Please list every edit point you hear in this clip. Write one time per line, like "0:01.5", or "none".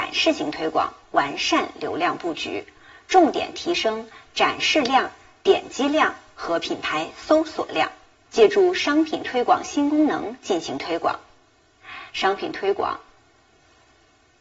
0:08.3